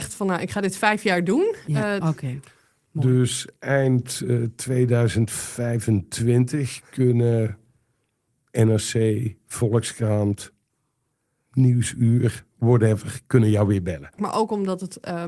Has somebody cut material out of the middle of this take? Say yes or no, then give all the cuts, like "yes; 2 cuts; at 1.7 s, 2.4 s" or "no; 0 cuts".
yes; 2 cuts; at 2.0 s, 14.2 s